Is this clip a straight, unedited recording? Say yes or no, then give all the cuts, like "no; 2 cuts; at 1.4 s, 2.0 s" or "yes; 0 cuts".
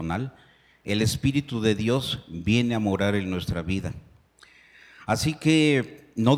yes; 0 cuts